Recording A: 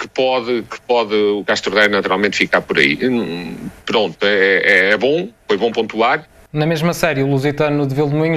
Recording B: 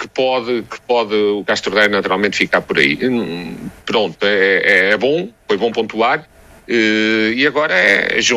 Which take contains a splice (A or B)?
A